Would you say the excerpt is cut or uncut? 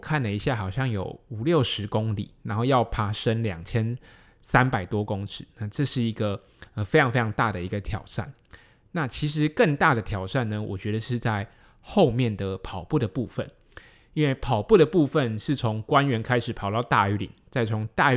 uncut